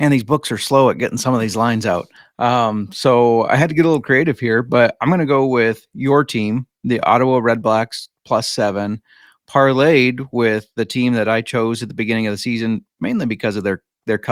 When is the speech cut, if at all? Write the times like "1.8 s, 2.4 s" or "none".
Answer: none